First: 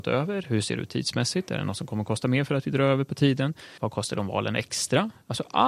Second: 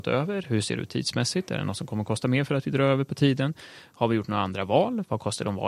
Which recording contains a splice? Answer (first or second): first